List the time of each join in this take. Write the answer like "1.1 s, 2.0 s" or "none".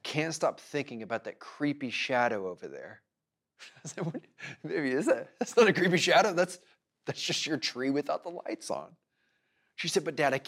none